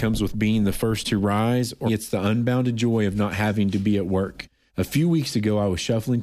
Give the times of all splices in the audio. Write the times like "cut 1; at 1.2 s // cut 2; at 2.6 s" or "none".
cut 1; at 1.9 s // cut 2; at 4.7 s